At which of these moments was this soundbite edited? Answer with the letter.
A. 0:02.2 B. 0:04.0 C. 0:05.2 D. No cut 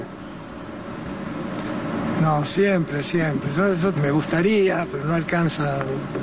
B